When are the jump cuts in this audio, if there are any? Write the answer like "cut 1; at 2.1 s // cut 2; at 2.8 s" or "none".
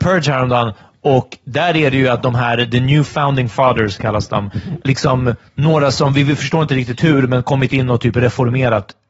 cut 1; at 4.8 s